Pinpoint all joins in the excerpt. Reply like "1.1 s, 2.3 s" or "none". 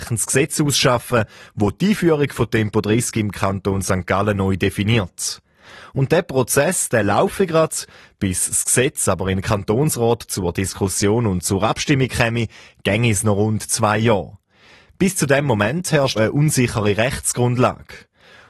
16.2 s

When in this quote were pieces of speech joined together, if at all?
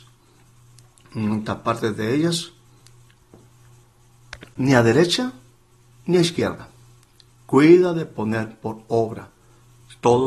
none

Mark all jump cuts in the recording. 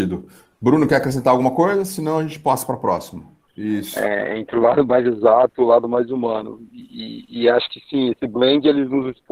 3.5 s

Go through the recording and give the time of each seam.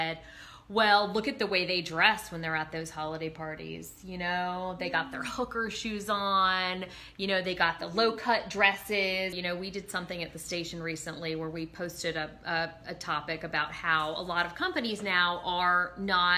9.3 s

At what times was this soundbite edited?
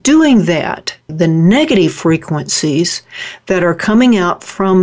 1.1 s

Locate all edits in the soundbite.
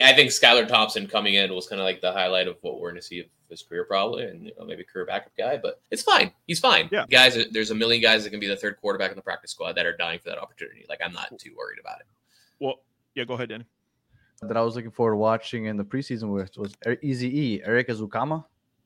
5.9 s, 7.1 s, 14.4 s

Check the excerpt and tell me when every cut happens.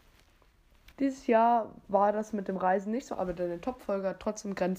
0.9 s, 3.1 s

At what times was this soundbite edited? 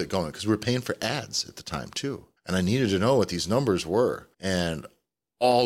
2.4 s, 4.3 s

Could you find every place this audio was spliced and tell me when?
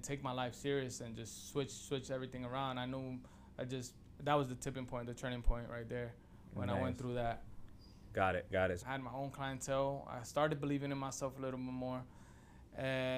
8.8 s

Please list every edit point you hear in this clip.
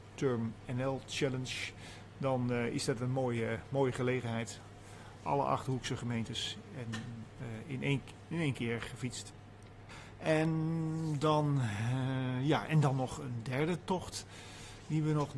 none

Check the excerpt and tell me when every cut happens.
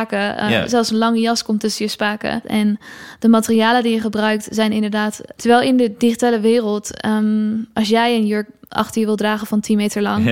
2.4 s, 5.3 s

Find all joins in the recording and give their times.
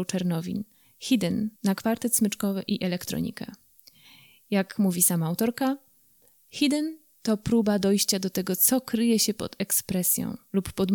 1.6 s

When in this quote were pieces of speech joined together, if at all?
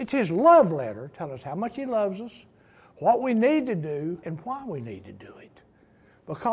4.2 s

